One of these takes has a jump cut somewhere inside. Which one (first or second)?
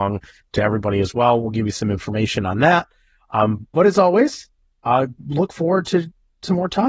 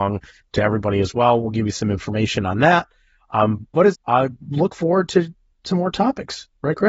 second